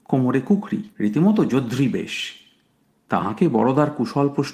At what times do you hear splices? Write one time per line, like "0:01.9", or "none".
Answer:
0:00.9